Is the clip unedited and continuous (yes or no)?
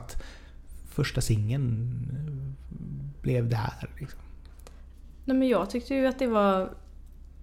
yes